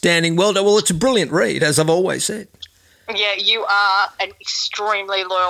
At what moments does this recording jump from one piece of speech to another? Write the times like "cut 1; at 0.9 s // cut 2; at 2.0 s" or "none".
none